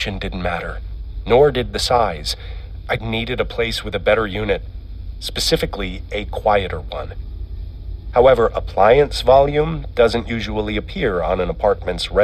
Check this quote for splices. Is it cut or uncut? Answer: cut